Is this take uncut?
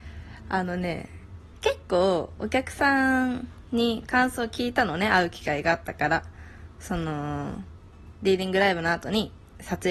yes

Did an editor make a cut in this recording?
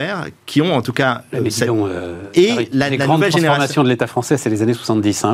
no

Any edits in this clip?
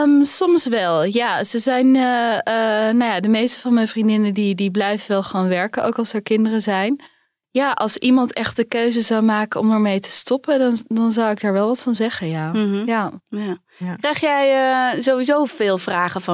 no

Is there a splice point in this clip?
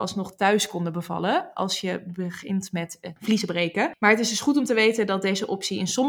no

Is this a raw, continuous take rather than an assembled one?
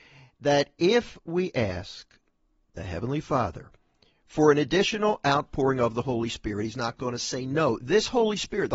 yes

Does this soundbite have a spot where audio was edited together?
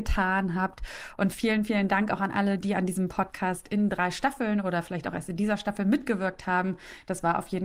no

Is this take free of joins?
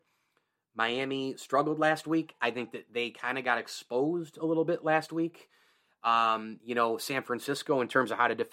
yes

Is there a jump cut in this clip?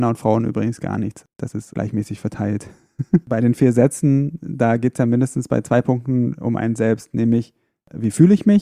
yes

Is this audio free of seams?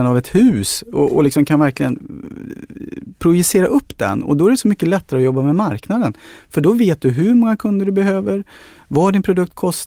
yes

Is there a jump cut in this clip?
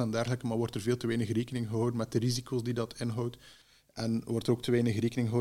no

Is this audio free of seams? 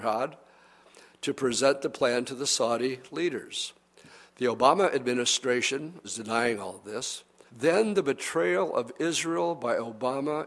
no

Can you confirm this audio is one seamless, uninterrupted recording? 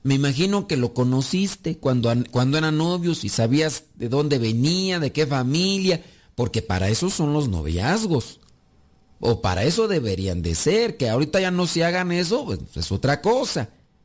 yes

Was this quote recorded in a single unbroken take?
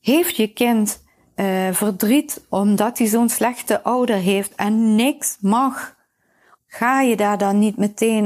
no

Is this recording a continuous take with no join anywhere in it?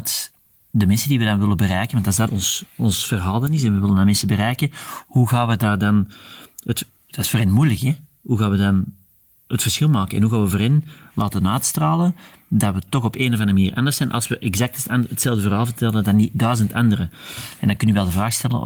no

